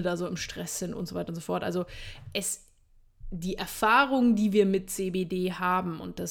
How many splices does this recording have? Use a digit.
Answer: 0